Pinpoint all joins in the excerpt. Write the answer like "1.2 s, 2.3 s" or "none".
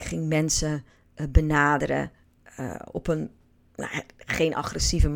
none